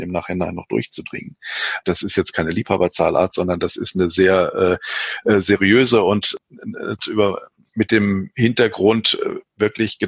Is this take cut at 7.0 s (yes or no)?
yes